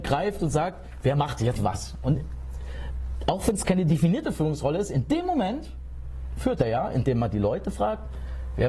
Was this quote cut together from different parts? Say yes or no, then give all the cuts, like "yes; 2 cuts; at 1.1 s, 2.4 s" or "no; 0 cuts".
yes; 2 cuts; at 1.6 s, 6.4 s